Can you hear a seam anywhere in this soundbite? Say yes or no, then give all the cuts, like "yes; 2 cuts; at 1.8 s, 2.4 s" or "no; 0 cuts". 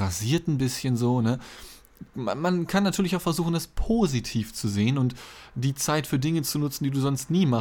no; 0 cuts